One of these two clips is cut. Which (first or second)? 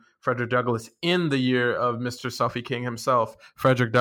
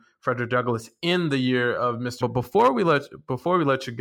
second